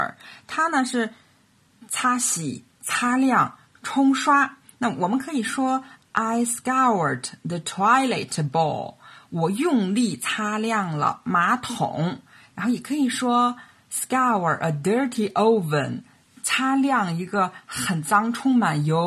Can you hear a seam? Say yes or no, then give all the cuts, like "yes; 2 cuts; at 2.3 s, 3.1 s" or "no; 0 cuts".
no; 0 cuts